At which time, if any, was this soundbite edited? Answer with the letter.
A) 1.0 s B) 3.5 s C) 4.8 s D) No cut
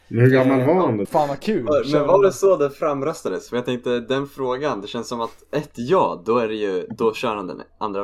A